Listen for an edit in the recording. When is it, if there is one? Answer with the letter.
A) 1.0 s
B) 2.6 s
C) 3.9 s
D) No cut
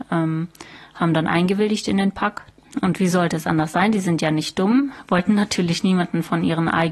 B